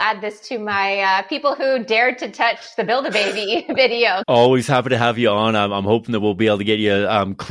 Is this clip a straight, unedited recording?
no; 1 cut; at 4.2 s

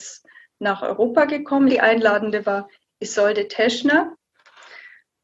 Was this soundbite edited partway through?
yes; 1 cut; at 1.7 s

